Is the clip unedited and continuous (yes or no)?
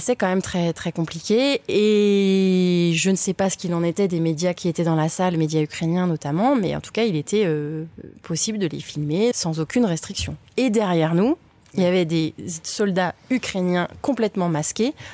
yes